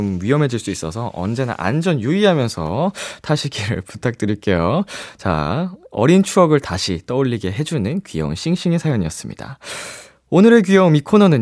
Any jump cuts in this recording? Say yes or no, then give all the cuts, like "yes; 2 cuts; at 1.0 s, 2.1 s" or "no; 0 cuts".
no; 0 cuts